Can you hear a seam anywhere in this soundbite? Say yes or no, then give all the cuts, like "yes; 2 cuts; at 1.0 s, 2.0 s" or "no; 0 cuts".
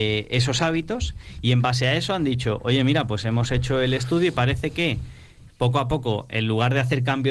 yes; 1 cut; at 5.5 s